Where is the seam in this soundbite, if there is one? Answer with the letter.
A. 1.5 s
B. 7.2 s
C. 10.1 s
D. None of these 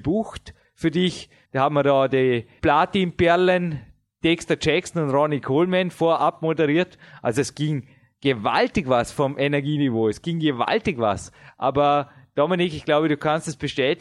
A